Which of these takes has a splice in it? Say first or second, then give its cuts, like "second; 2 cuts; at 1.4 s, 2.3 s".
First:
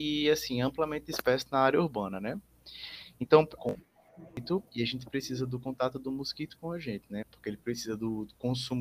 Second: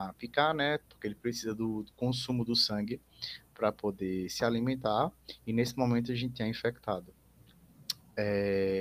first; 2 cuts; at 3.6 s, 7.2 s